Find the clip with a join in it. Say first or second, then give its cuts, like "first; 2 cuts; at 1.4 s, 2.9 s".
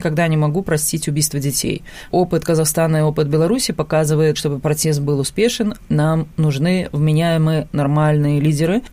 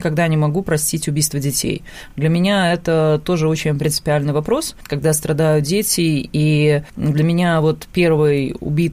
first; 2 cuts; at 2.1 s, 4.4 s